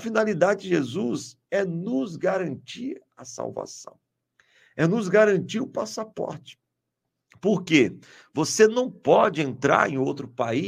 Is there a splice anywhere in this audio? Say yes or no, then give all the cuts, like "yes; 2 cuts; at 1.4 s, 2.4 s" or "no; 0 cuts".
no; 0 cuts